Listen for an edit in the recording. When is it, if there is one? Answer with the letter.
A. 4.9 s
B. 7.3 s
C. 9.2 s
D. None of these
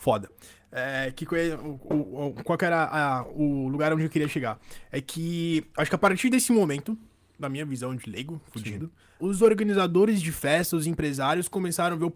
C